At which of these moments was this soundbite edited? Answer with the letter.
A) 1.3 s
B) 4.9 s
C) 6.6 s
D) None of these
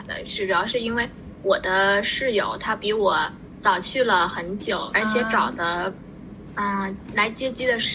B